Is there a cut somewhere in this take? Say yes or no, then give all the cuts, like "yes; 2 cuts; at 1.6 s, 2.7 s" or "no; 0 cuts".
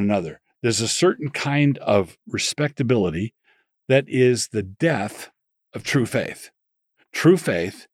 no; 0 cuts